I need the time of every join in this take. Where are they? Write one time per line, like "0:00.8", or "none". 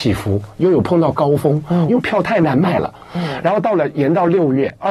0:01.9